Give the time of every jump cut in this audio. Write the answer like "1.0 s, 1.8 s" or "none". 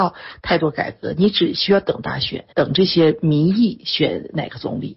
2.5 s

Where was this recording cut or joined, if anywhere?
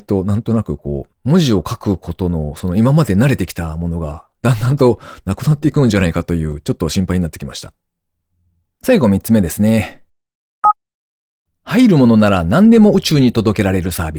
none

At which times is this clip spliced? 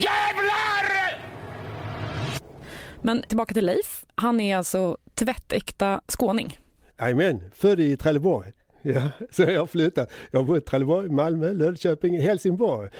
3.3 s

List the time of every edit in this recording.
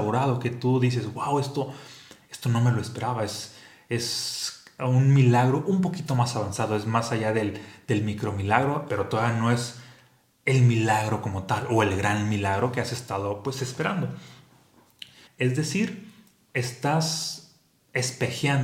8.9 s, 15.3 s

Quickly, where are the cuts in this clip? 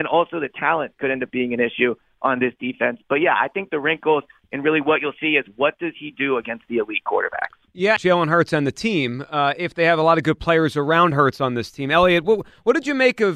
8.0 s

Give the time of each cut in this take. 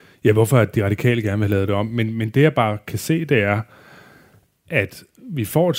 none

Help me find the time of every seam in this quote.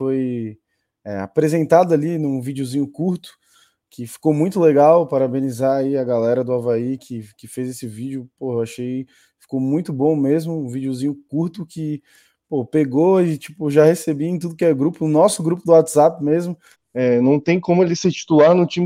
16.7 s

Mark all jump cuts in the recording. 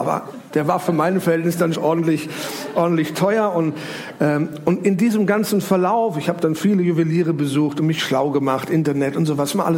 1.7 s

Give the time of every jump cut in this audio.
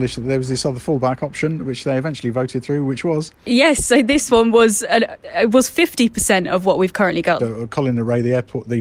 7.4 s

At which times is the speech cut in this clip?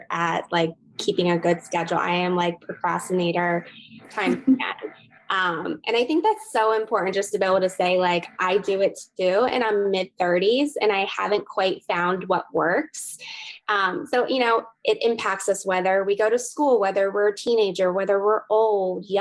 none

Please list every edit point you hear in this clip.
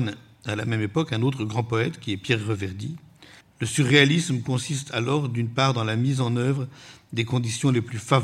3.4 s

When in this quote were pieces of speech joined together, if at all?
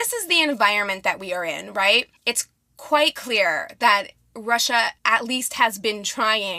2.2 s, 5.0 s

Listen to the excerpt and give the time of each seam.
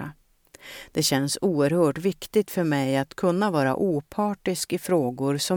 none

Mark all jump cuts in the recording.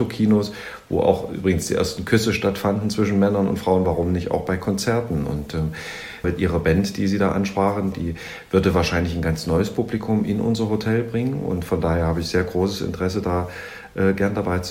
6.2 s, 7.9 s

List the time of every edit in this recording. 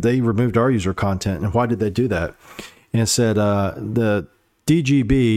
none

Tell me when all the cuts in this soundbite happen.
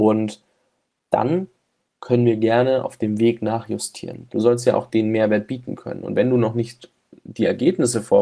4.3 s

